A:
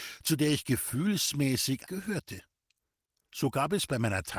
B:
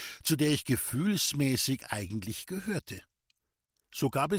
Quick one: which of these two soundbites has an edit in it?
A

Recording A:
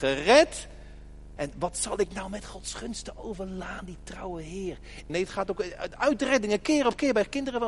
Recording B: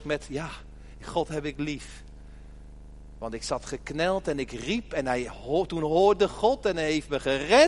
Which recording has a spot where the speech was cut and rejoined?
A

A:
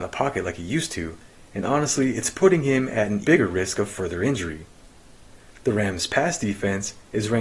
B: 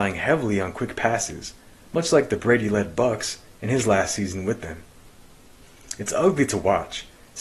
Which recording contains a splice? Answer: A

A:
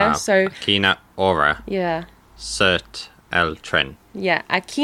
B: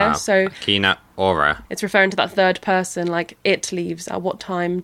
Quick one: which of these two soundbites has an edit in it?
B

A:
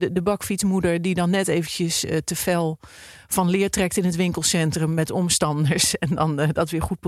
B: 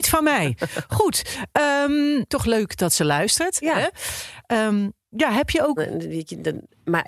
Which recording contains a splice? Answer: B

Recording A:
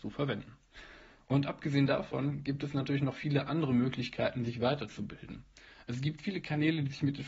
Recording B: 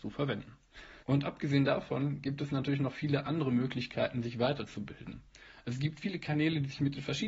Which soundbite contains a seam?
B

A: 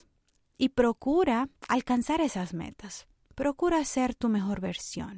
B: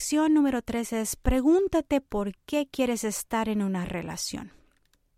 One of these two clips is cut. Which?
A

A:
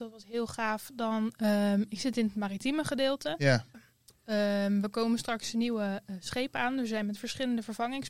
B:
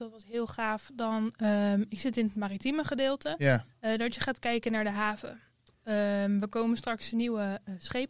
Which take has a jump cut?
A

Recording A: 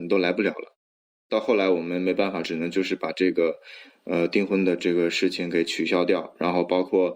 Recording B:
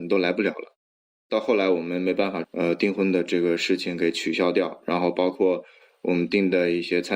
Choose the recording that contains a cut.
B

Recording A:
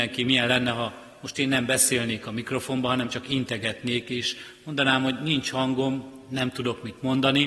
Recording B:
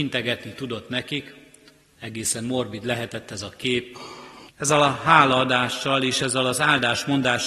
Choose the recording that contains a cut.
B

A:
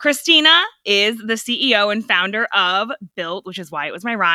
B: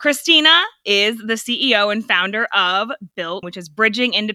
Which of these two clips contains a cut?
B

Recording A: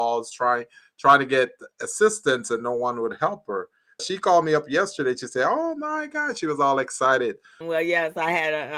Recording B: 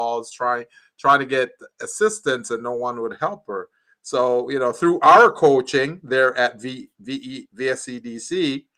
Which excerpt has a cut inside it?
A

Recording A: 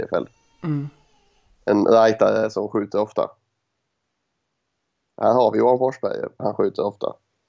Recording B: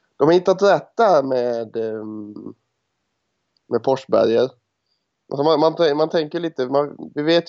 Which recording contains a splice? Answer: A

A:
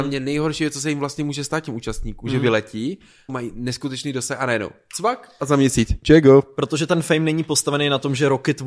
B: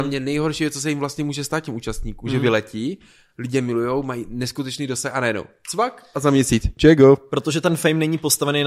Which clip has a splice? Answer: A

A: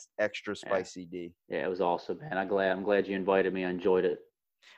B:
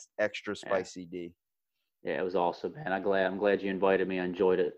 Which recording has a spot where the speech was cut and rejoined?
A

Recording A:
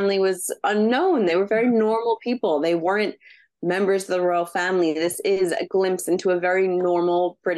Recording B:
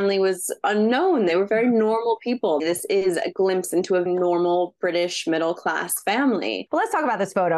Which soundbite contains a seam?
B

